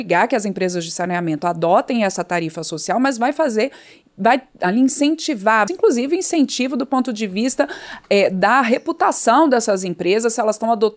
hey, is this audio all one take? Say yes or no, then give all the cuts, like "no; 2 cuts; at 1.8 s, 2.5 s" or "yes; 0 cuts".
no; 1 cut; at 5.7 s